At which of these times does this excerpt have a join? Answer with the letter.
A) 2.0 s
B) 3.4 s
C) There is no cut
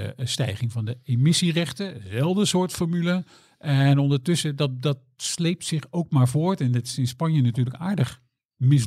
C